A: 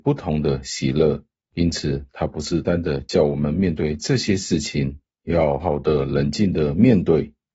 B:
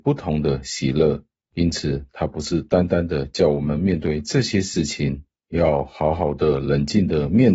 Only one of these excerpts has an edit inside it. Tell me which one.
A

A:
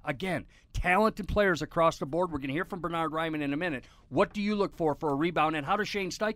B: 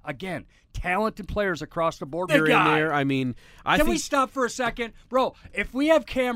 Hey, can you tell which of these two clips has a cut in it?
B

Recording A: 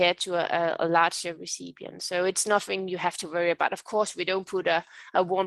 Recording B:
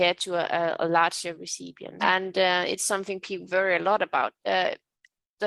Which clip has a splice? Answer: B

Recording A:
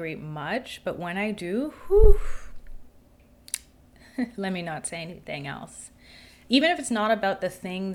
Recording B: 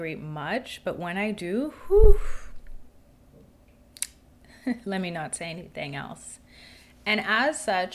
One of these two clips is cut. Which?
A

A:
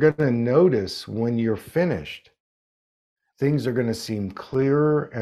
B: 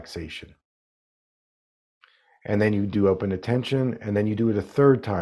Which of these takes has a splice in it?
A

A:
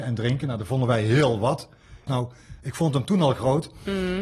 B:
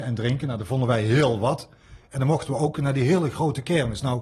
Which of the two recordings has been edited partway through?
A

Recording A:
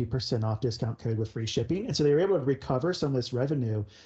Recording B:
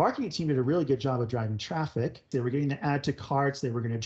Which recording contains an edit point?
B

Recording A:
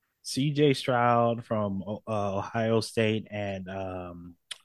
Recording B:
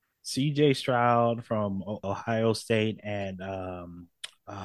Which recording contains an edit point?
B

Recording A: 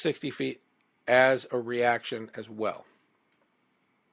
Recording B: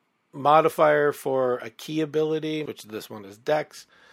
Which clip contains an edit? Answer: B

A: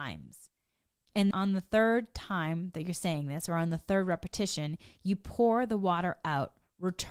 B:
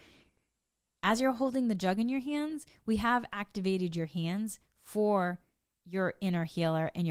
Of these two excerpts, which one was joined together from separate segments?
A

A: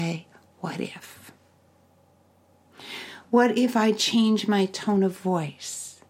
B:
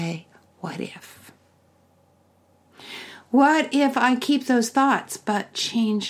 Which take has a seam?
A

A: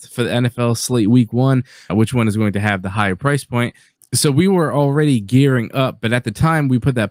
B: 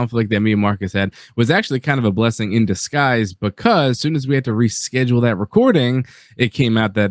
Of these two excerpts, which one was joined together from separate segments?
A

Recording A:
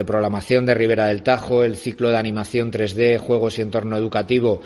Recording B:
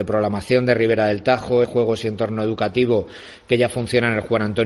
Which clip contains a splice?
B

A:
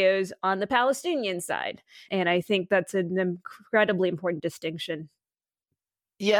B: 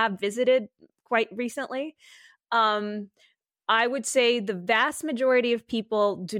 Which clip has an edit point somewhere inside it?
A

